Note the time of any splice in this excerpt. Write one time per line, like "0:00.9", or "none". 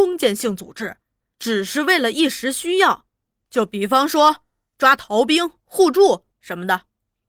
none